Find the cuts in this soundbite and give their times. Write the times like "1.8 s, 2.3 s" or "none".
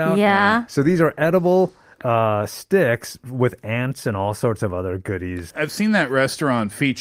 5.5 s